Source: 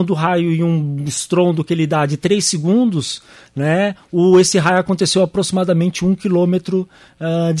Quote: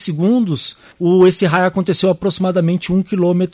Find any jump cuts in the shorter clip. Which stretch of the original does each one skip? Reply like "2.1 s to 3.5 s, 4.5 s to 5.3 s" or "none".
3.4 s to 4.0 s

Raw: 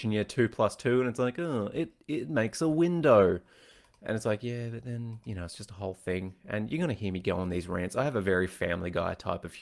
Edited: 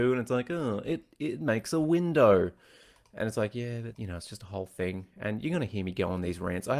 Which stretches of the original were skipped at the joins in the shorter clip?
4.8 s to 5.2 s

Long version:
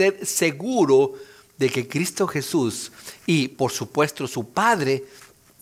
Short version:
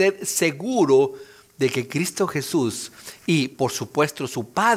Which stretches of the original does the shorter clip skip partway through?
none

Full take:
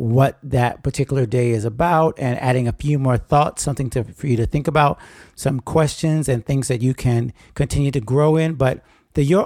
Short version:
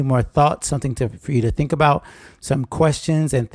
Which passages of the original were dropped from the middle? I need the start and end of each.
none

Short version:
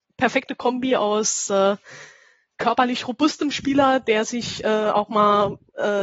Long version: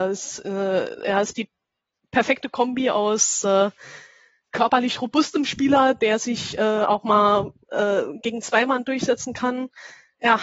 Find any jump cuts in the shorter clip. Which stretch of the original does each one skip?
none

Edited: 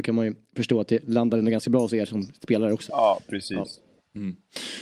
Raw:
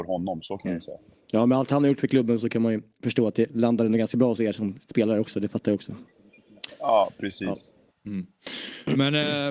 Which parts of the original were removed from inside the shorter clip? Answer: 5.3 s to 6.8 s

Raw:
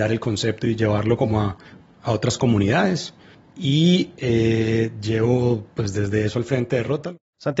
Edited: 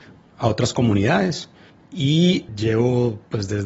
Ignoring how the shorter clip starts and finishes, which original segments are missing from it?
4.1 s to 4.9 s

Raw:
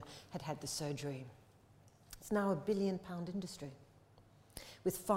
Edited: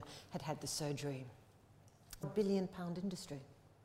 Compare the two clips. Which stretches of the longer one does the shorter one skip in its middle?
2.2 s to 2.5 s

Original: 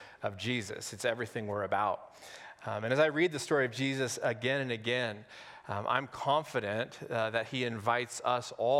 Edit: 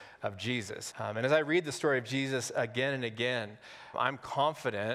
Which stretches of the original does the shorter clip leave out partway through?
0.9 s to 2.6 s, 5.6 s to 5.8 s

